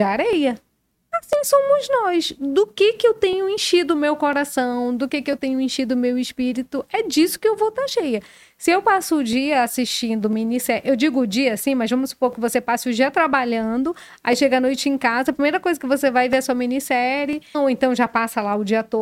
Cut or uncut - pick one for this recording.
cut